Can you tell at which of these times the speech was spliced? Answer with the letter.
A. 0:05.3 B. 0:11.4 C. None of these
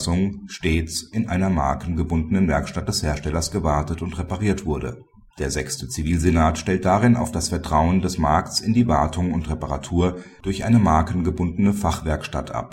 A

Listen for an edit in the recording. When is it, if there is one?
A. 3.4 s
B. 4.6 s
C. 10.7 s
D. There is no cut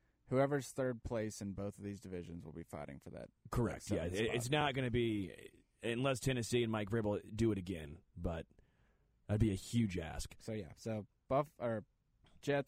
D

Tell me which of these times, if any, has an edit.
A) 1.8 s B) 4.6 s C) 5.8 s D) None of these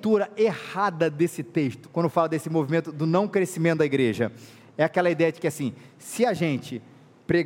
A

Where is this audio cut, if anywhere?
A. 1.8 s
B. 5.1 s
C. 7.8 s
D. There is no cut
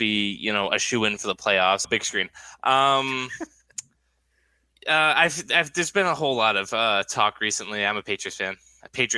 A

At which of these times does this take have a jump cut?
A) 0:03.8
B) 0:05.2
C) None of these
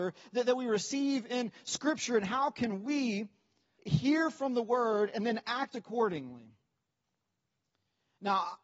A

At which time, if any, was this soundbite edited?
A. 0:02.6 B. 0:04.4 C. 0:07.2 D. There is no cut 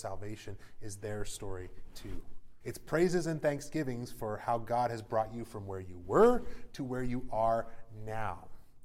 A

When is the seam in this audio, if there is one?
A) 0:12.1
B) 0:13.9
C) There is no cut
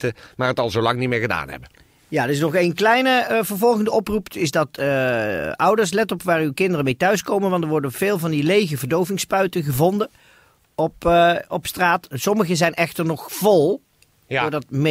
C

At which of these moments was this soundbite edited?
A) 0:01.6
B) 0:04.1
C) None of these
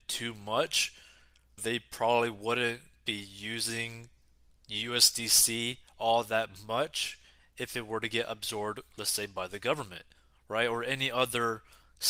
A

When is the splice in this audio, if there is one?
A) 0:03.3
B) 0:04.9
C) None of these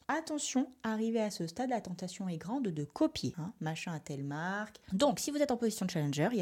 B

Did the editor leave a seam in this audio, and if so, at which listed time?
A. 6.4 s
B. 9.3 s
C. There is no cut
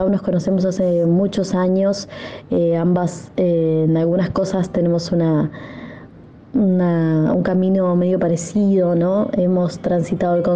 C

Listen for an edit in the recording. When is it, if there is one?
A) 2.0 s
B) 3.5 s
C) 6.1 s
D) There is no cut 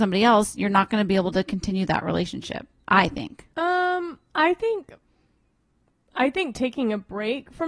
B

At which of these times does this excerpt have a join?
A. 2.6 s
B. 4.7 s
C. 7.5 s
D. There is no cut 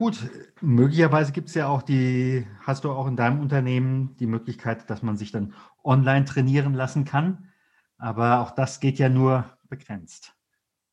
D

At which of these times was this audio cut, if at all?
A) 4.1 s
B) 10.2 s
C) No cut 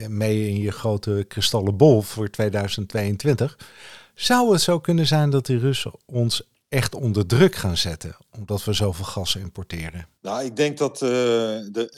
B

